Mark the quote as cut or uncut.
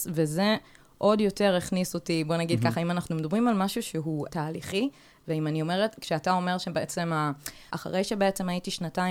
cut